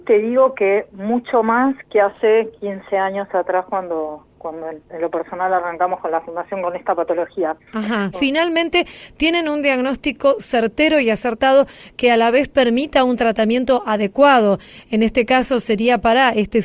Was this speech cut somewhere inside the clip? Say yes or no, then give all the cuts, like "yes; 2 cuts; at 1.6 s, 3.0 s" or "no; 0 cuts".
yes; 1 cut; at 8.1 s